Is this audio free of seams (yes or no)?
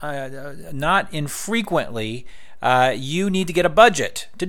yes